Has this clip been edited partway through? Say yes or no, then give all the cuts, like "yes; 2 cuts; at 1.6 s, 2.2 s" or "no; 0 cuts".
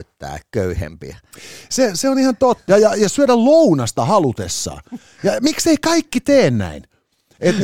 yes; 1 cut; at 2.7 s